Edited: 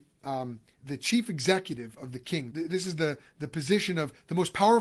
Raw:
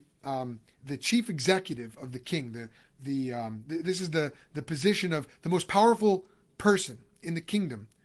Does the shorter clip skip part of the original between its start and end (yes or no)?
yes